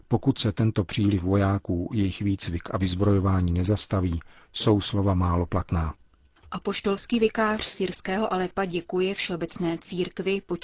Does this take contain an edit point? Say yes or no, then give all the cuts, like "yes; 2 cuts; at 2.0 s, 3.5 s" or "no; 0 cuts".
no; 0 cuts